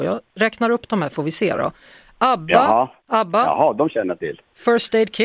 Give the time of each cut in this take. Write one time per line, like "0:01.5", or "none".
0:03.0